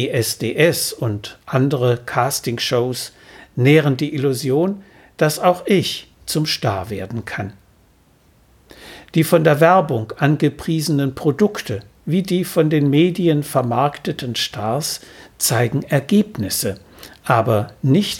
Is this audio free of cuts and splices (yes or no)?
no